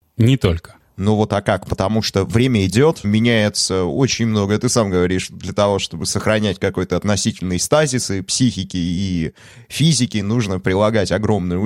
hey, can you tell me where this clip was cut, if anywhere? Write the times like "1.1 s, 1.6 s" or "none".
3.0 s